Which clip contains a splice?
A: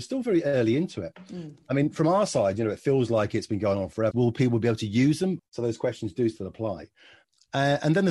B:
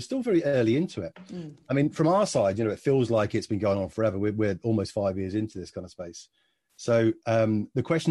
A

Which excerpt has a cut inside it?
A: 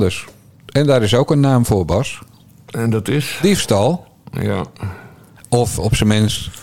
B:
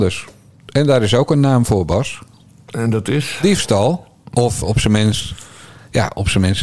B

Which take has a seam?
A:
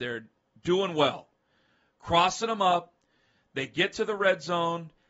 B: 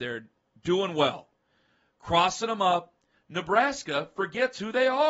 B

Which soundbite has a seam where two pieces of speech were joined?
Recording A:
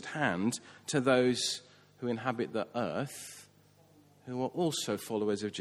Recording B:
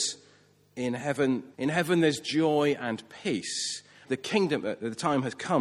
B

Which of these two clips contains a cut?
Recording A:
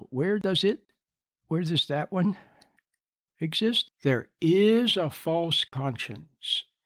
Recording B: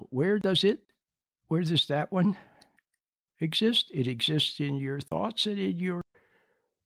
A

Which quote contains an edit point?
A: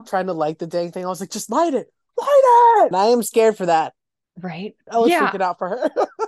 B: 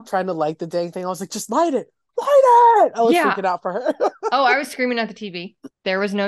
A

